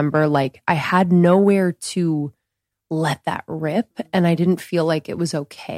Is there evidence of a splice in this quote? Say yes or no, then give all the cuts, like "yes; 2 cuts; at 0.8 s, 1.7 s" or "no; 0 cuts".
no; 0 cuts